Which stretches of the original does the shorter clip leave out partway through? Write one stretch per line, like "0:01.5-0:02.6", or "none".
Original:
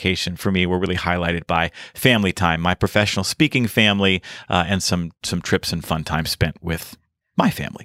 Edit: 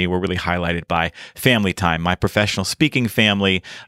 none

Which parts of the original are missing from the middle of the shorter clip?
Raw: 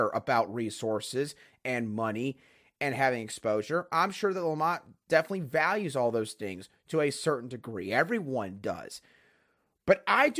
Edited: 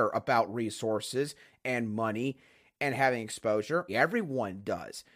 0:03.9-0:07.9

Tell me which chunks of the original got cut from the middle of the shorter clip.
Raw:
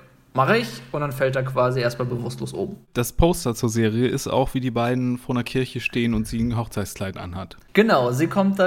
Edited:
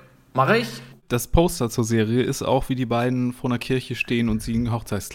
0:00.9-0:02.8

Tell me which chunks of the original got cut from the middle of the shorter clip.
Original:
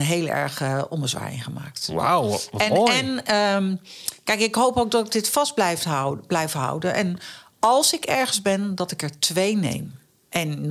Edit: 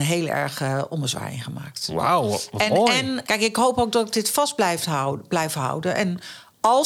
0:03.2-0:04.2

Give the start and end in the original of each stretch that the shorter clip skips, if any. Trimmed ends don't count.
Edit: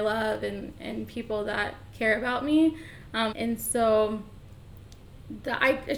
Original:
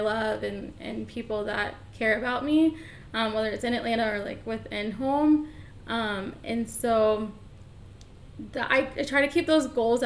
0:03.3-0:06.4

